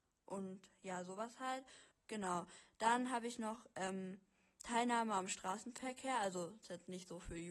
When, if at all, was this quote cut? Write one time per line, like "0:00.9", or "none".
0:01.9